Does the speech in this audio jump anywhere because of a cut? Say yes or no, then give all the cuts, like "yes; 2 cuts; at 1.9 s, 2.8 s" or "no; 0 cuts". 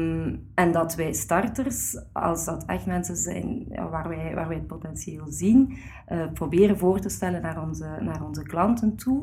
no; 0 cuts